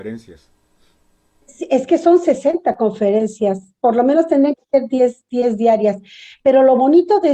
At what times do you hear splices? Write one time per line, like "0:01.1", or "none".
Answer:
none